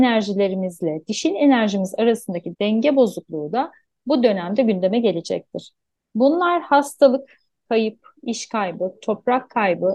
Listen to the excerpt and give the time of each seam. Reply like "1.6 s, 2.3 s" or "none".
none